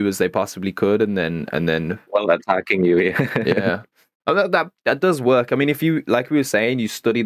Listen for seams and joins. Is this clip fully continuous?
yes; 0 cuts

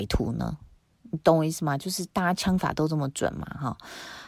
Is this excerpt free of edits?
yes; 0 cuts

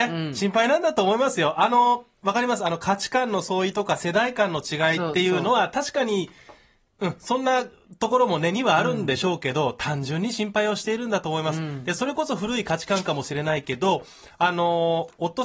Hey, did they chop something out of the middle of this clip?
no; 0 cuts

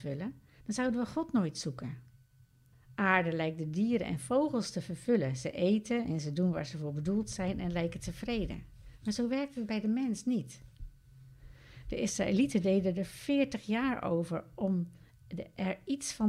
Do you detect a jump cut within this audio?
yes; 1 cut; at 2.7 s

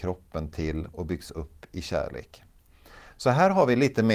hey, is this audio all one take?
yes; 0 cuts

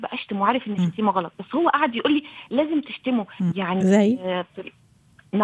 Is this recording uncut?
no; 1 cut; at 3.5 s

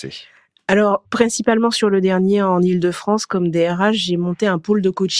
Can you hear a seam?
yes; 1 cut; at 1.0 s

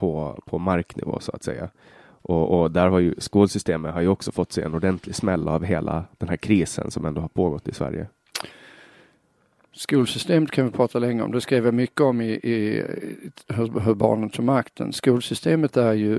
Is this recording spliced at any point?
no; 0 cuts

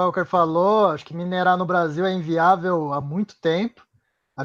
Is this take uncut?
yes; 0 cuts

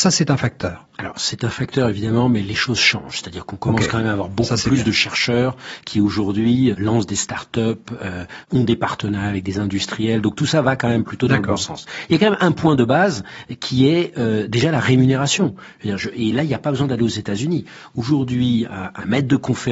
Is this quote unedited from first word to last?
no; 1 cut; at 6.7 s

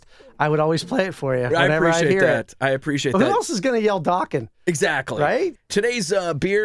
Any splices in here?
no; 0 cuts

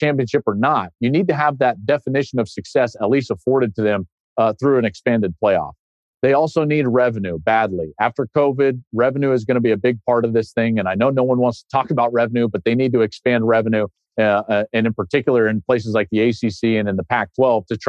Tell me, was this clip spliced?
no; 0 cuts

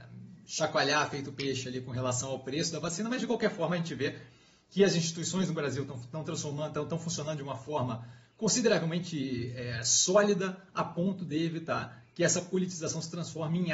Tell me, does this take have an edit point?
no; 0 cuts

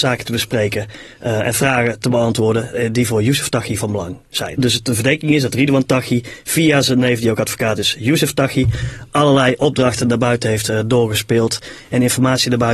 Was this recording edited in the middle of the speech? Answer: yes; 1 cut; at 4.6 s

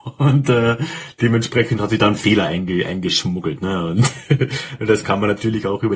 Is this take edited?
no; 0 cuts

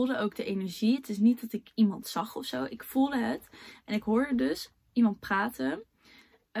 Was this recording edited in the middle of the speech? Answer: no; 0 cuts

